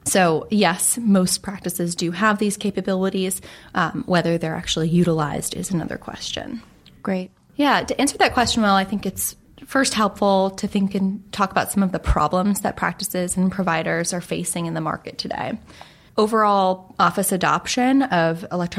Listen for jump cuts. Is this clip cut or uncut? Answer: cut